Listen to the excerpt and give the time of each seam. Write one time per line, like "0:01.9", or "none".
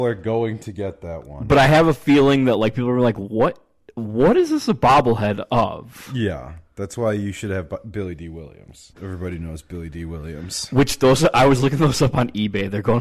0:08.9